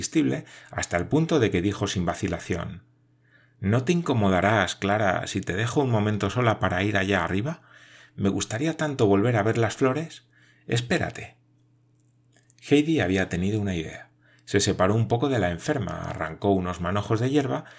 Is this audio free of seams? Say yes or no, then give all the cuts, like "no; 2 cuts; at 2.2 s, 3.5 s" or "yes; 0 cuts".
yes; 0 cuts